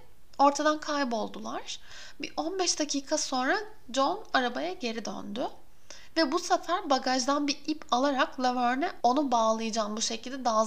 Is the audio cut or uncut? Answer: uncut